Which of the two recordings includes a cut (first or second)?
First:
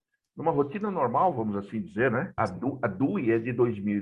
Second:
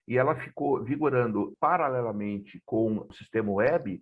first